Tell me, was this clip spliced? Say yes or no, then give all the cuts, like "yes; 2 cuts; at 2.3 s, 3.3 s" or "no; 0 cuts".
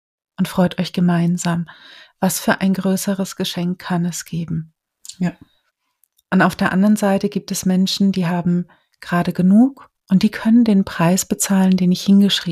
no; 0 cuts